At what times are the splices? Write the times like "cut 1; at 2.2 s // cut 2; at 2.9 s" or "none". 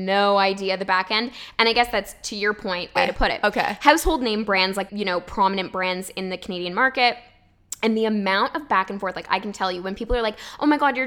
cut 1; at 3.0 s // cut 2; at 4.9 s